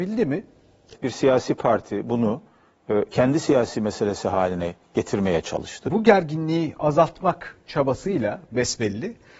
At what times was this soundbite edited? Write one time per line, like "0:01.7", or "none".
0:00.9
0:05.9